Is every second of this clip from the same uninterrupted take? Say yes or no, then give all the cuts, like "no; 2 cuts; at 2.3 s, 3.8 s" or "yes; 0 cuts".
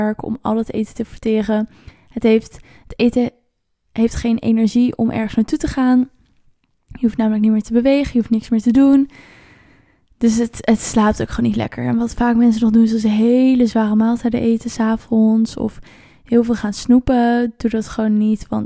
yes; 0 cuts